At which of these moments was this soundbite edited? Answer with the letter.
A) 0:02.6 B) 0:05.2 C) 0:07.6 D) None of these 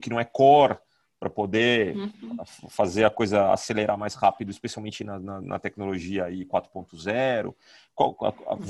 D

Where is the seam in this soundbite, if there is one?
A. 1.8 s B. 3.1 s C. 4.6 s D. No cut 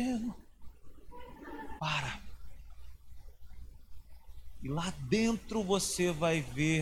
A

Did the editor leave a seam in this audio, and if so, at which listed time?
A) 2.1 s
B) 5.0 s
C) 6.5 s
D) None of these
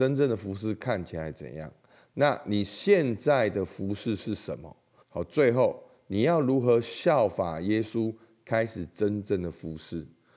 B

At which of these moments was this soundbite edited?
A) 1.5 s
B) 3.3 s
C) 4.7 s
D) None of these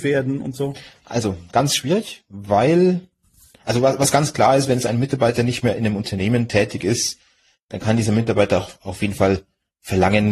D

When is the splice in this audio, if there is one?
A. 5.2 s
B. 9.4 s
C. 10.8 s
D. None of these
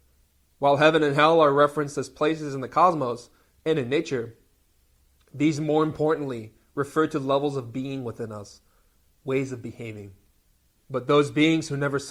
C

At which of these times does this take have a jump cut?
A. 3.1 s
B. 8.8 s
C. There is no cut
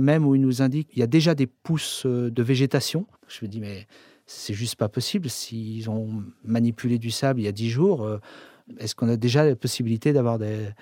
A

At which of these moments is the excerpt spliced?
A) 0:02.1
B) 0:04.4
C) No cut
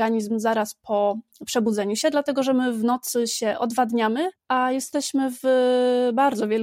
B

